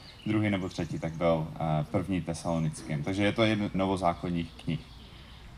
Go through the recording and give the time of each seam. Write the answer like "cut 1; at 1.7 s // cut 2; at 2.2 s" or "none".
cut 1; at 3.7 s